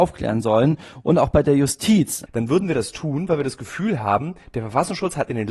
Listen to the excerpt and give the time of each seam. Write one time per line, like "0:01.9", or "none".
0:02.3